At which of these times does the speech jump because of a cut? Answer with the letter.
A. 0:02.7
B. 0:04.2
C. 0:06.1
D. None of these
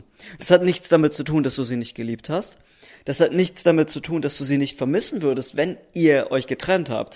D